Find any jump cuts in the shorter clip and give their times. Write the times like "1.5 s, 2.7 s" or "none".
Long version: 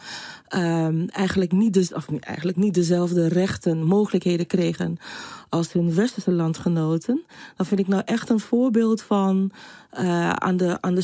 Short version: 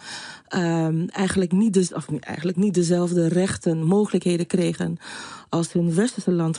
none